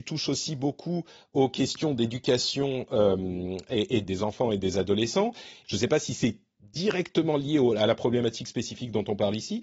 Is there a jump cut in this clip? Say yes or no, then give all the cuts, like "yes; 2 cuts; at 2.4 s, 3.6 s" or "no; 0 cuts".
yes; 2 cuts; at 4.0 s, 5.6 s